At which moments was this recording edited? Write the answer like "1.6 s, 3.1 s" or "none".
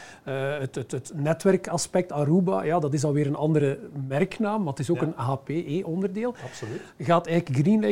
none

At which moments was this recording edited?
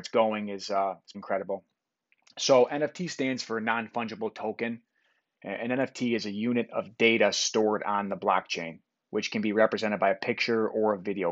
1.1 s

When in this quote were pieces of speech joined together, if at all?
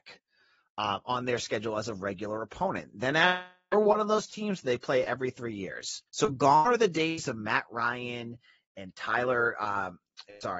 6.1 s

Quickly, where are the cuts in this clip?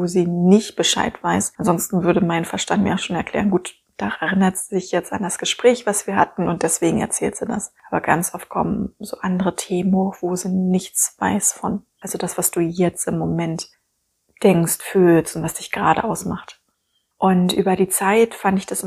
12.0 s

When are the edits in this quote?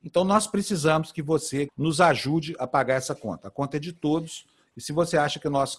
1.7 s

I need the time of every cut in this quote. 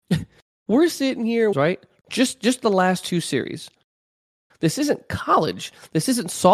1.5 s, 4.5 s

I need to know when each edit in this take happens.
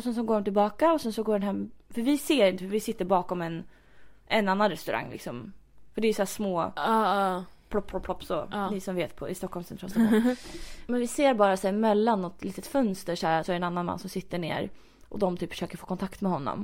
10.9 s, 13.4 s

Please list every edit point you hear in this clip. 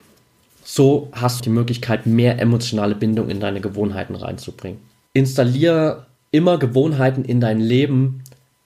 1.4 s, 5.1 s

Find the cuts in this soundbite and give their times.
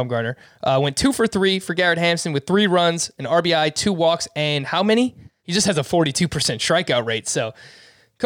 5.4 s

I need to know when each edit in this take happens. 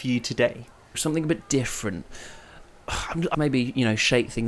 0.9 s, 3.3 s

